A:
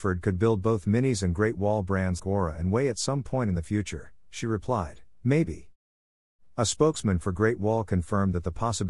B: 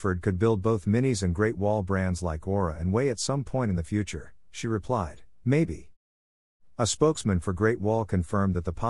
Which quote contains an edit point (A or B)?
A